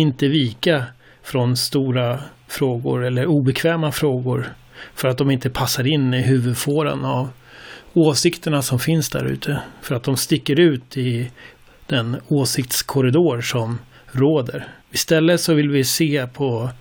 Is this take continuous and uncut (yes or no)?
no